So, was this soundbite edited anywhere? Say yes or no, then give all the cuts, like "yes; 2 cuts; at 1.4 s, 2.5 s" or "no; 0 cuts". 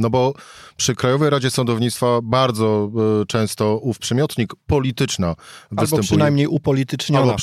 no; 0 cuts